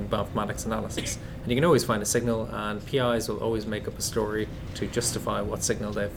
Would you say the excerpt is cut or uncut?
cut